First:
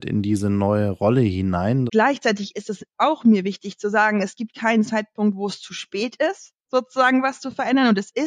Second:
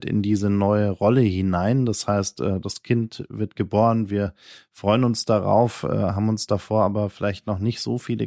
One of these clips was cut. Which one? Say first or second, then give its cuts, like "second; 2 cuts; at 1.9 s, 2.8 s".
first; 1 cut; at 1.9 s